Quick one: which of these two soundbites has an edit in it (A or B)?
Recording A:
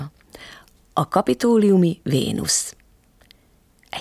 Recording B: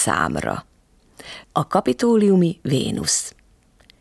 B